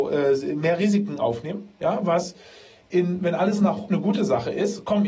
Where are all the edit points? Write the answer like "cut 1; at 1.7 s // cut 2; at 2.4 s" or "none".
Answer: cut 1; at 3.9 s

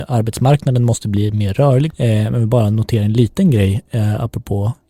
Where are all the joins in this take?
cut 1; at 1.9 s

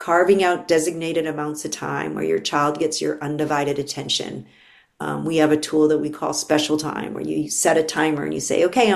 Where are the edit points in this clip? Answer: none

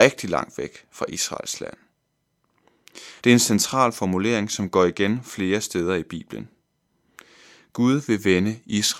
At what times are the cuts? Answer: cut 1; at 3.2 s

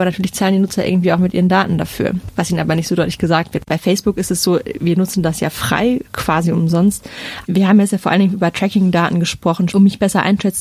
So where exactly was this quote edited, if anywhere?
cut 1; at 7.4 s // cut 2; at 9.7 s

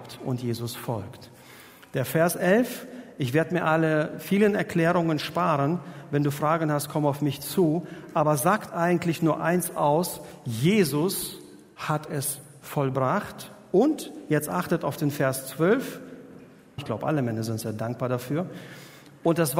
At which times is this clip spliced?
cut 1; at 16.8 s

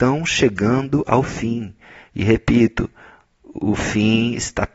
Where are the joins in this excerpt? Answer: none

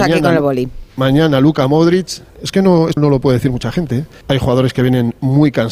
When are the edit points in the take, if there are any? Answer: cut 1; at 3.0 s // cut 2; at 4.2 s

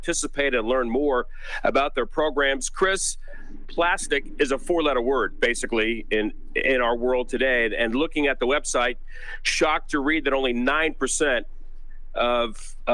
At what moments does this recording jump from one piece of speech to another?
none

